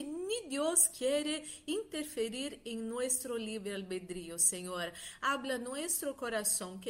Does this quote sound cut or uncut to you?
uncut